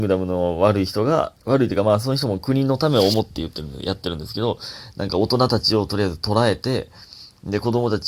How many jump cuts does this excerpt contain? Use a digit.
1